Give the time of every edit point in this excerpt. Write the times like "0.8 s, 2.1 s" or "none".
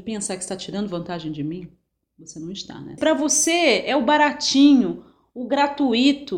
3.0 s